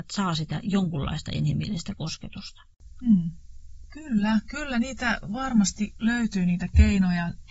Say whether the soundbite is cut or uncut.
uncut